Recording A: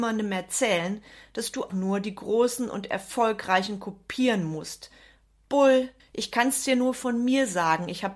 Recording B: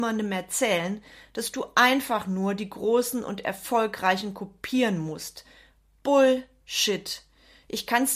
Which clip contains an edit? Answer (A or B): A